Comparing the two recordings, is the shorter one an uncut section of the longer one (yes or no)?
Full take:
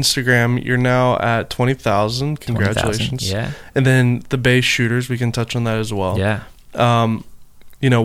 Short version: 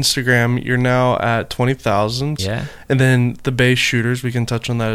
no